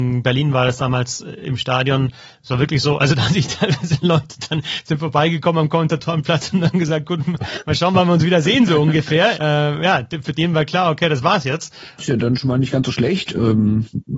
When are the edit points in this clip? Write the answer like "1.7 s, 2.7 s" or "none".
9.3 s, 12.0 s